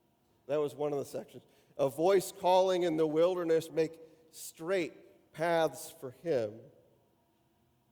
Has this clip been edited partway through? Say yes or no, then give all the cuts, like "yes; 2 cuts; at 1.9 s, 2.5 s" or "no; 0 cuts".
yes; 1 cut; at 3.7 s